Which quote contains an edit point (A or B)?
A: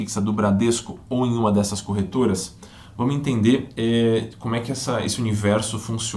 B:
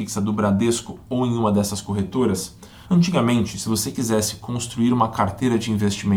B